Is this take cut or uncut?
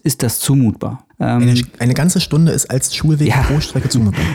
cut